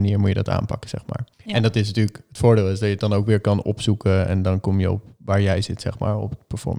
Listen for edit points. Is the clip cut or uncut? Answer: cut